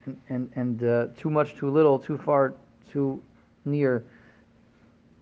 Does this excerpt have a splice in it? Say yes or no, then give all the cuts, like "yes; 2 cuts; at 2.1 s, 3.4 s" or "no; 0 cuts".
no; 0 cuts